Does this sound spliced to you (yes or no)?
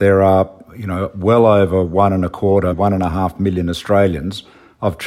yes